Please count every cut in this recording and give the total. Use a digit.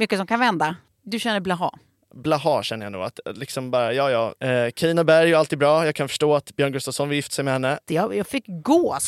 1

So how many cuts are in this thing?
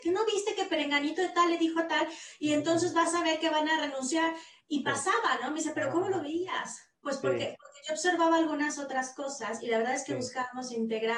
0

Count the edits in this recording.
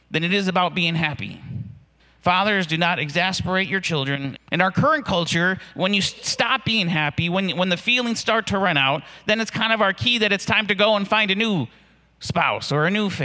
2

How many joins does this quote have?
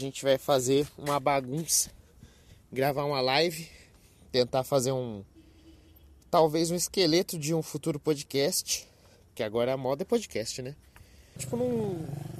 1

